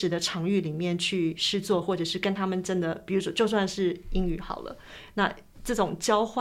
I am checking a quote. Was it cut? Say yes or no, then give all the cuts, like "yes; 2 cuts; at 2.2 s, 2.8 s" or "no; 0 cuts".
no; 0 cuts